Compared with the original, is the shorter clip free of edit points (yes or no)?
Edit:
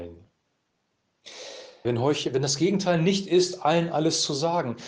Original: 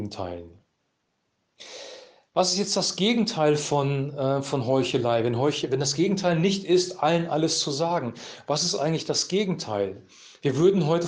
no